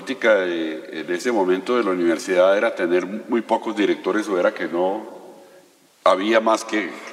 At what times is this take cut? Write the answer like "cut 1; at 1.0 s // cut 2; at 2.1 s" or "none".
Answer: none

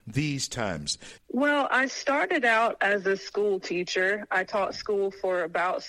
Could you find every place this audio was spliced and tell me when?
cut 1; at 1.2 s

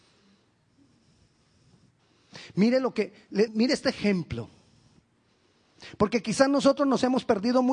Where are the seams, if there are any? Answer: cut 1; at 3.5 s

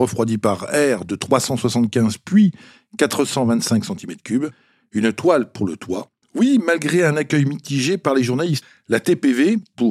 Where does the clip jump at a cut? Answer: cut 1; at 6.2 s

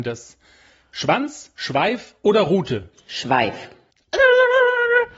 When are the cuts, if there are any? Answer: none

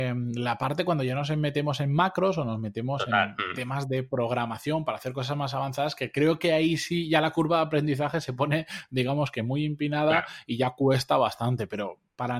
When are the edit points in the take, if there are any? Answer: none

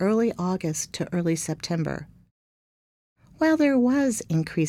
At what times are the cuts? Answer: none

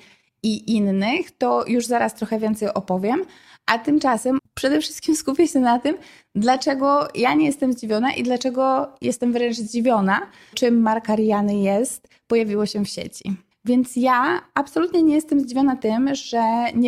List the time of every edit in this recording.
cut 1; at 4.4 s // cut 2; at 10.5 s // cut 3; at 13.5 s

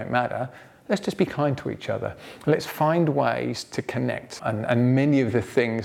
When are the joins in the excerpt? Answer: cut 1; at 4.4 s

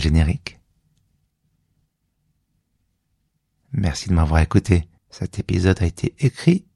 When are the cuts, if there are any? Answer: cut 1; at 5.0 s

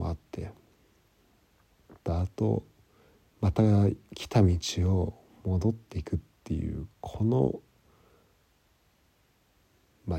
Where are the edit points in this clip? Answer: cut 1; at 2.0 s

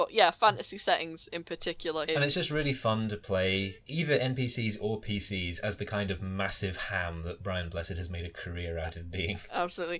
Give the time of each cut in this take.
cut 1; at 2.1 s // cut 2; at 3.8 s

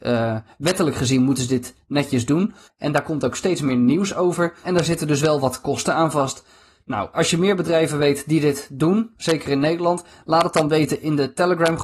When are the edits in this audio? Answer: cut 1; at 2.7 s // cut 2; at 4.6 s // cut 3; at 7.1 s

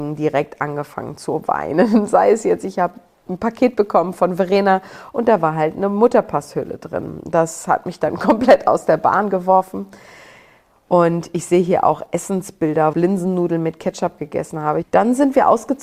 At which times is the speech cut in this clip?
cut 1; at 12.9 s // cut 2; at 14.8 s

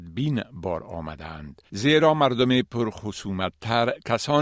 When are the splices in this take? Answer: cut 1; at 1.7 s

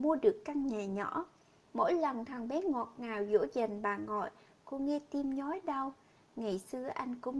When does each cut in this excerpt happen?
cut 1; at 1.7 s

